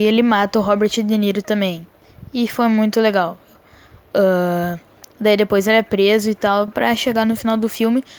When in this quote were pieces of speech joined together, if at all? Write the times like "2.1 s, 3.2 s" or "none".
none